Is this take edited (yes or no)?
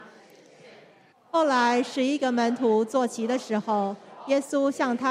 yes